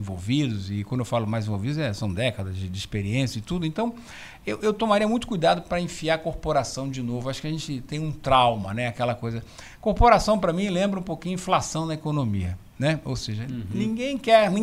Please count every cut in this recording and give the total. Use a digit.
0